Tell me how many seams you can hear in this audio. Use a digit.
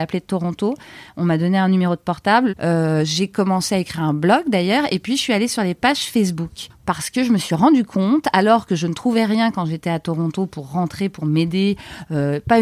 1